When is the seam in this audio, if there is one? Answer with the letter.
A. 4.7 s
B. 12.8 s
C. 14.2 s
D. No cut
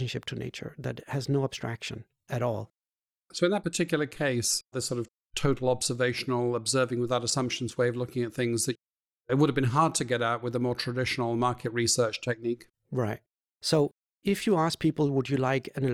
A